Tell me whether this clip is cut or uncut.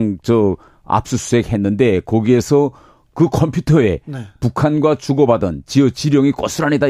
uncut